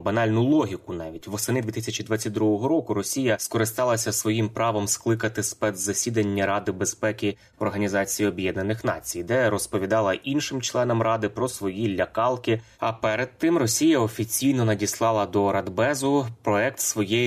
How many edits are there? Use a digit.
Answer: 1